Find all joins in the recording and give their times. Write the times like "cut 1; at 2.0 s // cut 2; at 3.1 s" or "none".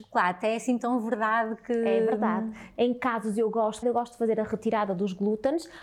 cut 1; at 2.8 s // cut 2; at 3.8 s